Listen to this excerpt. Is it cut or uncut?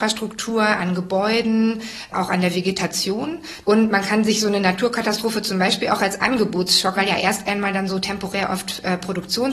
cut